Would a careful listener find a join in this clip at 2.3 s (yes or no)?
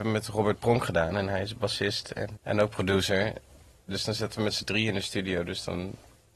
yes